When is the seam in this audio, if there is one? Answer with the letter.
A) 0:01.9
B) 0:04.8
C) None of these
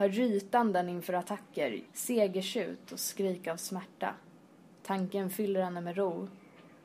A